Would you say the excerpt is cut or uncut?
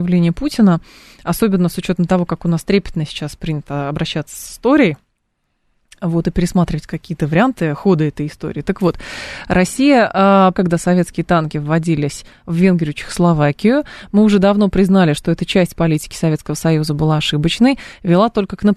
cut